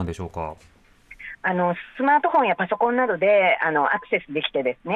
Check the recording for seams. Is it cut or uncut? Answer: uncut